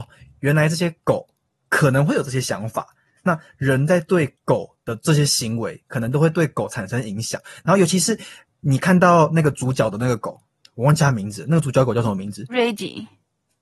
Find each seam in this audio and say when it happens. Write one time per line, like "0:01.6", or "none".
none